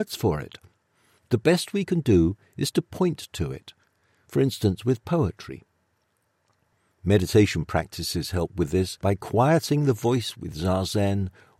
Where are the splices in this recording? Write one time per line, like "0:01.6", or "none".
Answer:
none